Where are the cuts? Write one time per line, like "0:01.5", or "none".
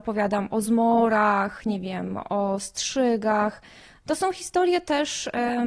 none